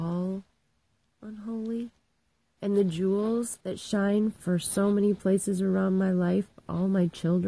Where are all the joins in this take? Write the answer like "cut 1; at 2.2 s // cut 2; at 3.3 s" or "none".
cut 1; at 2.6 s // cut 2; at 3.6 s